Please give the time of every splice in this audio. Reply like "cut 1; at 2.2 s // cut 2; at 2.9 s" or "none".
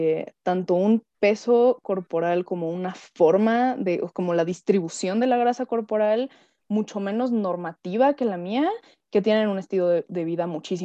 none

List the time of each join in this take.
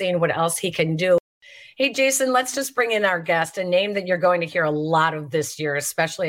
none

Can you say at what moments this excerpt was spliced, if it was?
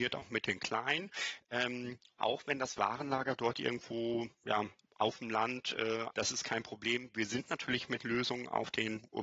cut 1; at 2.2 s // cut 2; at 6.1 s

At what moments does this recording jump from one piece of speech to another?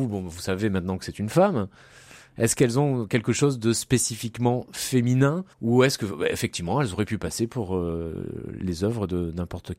cut 1; at 5.5 s

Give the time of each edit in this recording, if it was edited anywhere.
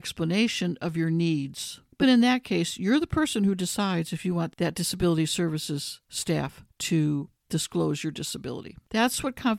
cut 1; at 2.0 s

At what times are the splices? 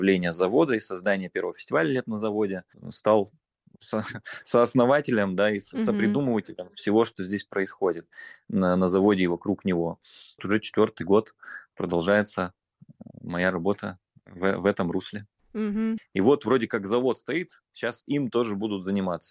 cut 1; at 10.4 s // cut 2; at 16.0 s

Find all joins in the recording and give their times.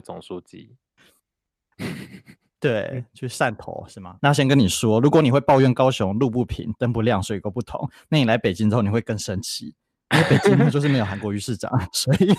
cut 1; at 4.2 s

